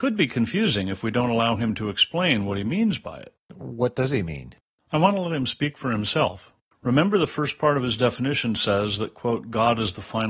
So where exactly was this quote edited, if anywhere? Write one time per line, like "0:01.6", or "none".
none